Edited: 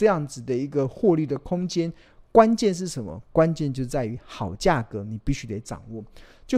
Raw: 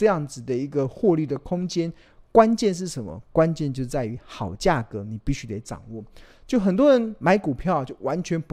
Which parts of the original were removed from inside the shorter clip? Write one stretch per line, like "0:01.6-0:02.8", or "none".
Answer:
none